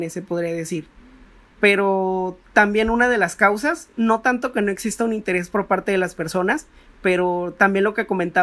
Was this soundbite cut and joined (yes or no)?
no